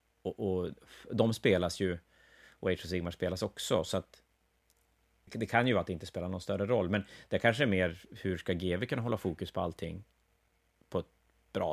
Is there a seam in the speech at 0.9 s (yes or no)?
no